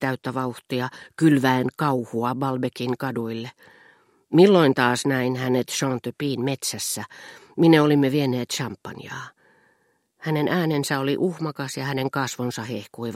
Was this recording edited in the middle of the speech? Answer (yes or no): no